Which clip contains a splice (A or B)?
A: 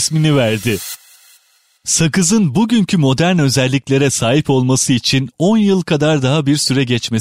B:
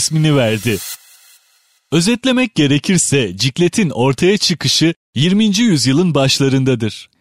B